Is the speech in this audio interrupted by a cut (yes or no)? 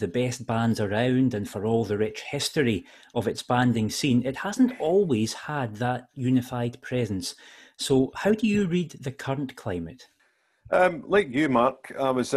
no